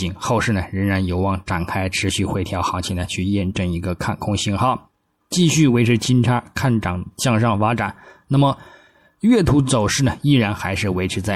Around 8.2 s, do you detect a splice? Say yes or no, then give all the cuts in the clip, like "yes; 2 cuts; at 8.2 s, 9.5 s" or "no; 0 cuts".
no; 1 cut; at 5.2 s